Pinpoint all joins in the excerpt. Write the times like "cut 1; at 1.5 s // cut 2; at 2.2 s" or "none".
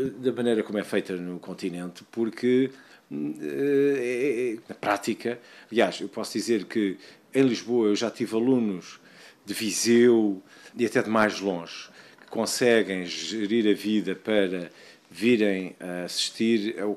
cut 1; at 4.6 s // cut 2; at 10.7 s